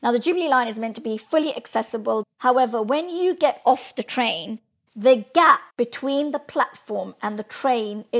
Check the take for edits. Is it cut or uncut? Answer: cut